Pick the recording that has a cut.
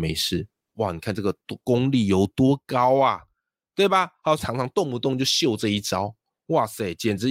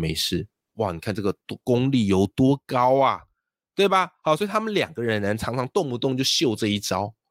first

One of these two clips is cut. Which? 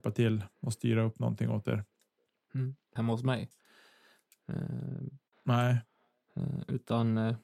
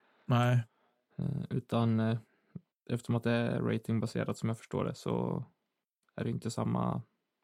first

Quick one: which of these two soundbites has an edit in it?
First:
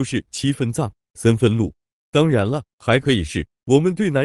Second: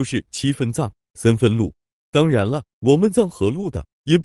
first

